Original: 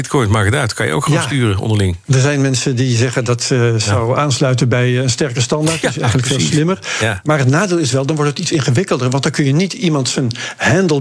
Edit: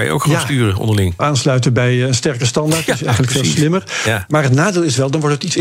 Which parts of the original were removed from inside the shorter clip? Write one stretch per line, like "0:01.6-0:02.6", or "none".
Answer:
0:02.0-0:04.1